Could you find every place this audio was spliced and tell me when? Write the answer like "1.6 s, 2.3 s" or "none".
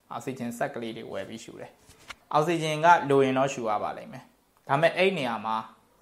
2.2 s